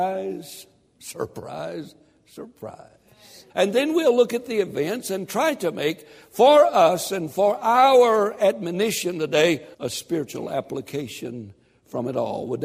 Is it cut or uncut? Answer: cut